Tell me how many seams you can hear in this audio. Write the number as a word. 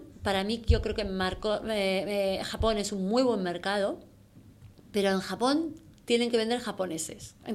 zero